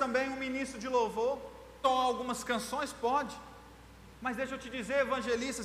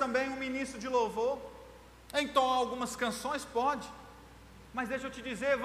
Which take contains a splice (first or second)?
first